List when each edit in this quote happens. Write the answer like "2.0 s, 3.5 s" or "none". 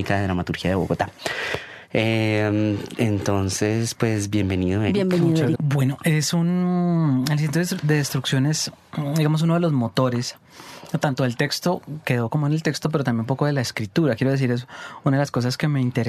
5.5 s